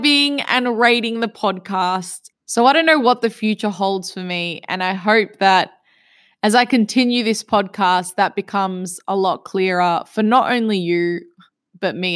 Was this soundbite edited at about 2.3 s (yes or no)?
yes